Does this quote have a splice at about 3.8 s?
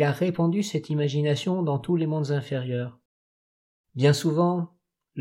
yes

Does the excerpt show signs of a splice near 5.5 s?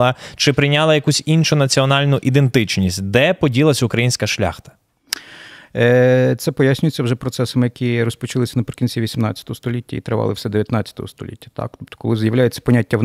no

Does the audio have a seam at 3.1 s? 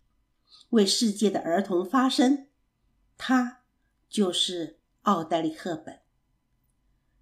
no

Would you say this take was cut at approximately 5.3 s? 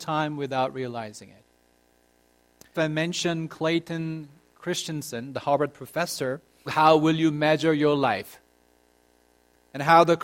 no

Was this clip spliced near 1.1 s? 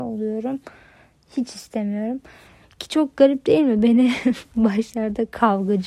no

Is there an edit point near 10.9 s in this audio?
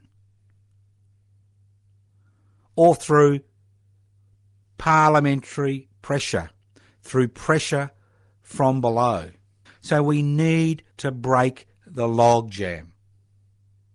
yes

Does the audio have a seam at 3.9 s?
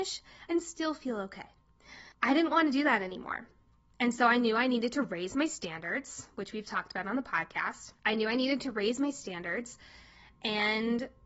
no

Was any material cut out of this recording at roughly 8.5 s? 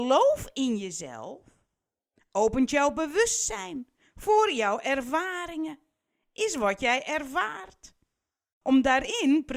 yes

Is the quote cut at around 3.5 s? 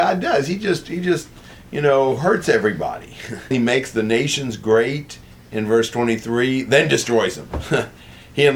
yes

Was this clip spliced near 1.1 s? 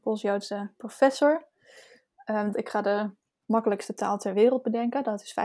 no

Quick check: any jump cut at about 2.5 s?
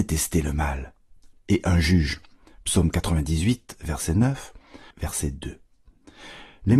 no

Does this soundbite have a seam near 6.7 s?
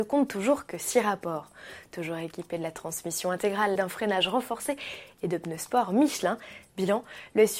yes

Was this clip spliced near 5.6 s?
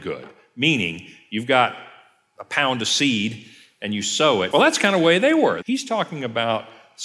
yes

